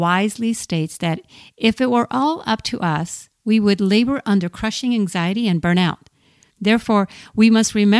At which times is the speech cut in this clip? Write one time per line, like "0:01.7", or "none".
0:06.5